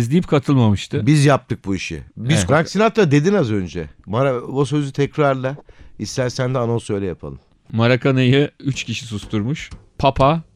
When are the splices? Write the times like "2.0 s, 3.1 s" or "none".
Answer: 2.5 s